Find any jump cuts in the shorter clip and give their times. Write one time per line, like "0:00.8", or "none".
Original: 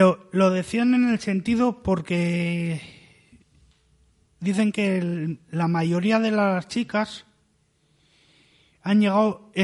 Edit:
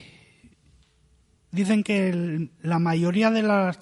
none